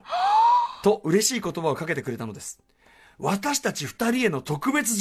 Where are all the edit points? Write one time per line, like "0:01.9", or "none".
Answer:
none